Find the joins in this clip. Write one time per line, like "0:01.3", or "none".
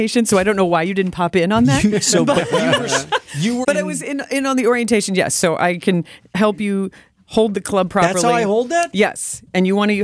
0:03.6